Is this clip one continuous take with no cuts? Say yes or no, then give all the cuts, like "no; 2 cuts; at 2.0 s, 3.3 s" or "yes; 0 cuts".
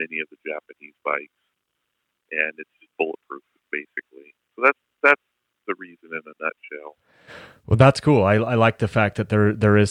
yes; 0 cuts